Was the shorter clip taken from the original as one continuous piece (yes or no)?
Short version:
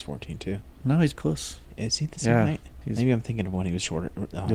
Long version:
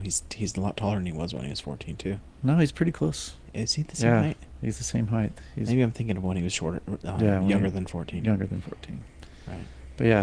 no